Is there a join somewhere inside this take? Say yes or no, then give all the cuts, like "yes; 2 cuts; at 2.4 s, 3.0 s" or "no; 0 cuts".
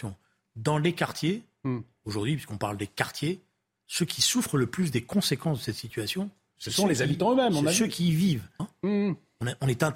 yes; 1 cut; at 8.6 s